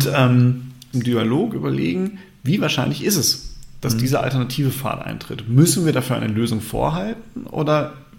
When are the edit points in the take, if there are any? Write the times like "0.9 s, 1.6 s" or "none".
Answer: 0.9 s